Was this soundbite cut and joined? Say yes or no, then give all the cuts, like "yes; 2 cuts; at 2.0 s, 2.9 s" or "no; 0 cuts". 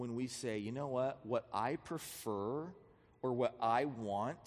no; 0 cuts